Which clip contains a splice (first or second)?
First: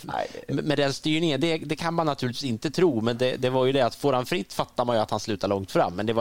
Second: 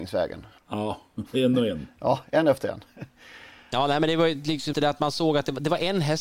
second